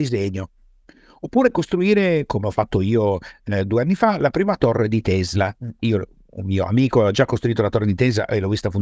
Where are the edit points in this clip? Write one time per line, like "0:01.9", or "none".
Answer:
none